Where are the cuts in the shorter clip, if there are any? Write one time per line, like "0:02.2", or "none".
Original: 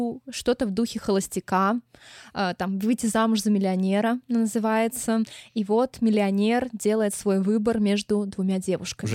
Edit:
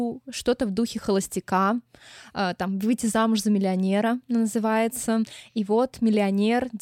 none